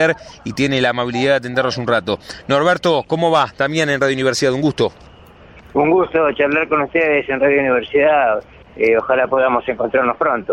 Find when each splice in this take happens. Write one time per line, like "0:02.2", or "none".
none